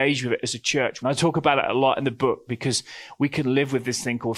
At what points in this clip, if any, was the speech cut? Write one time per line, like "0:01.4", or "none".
0:01.0